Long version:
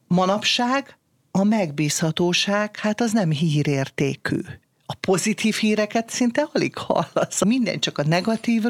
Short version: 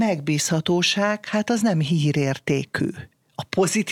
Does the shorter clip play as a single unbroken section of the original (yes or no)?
yes